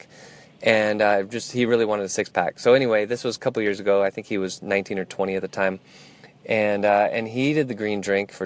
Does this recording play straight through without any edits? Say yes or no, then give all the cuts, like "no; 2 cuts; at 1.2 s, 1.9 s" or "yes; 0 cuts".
yes; 0 cuts